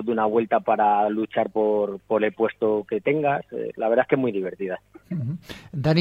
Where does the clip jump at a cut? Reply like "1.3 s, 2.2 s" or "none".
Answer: none